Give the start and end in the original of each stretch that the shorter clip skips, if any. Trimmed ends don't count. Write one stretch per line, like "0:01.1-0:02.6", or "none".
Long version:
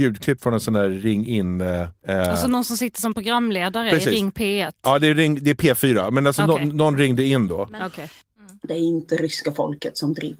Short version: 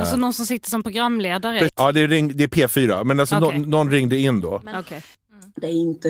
0:04.0-0:04.8